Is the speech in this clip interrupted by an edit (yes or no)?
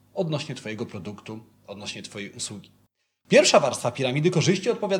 no